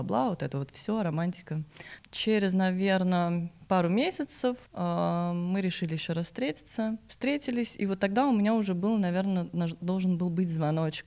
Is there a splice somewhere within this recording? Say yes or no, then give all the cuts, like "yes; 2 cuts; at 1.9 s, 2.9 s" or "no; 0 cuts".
yes; 1 cut; at 4.7 s